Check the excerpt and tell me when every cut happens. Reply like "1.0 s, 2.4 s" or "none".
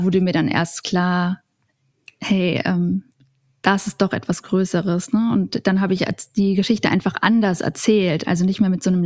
none